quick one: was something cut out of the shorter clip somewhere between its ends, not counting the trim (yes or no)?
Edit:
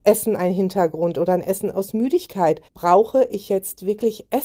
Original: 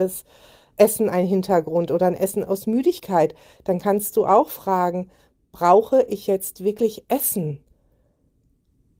yes